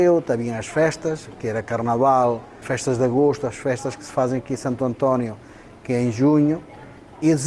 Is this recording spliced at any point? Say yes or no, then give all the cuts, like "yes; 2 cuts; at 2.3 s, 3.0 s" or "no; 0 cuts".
yes; 1 cut; at 2.6 s